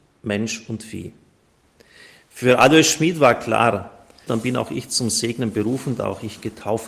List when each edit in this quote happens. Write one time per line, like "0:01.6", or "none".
0:04.3